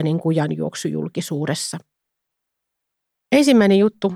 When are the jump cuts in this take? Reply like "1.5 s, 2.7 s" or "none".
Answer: none